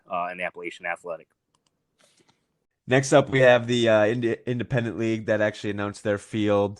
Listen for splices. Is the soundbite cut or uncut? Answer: uncut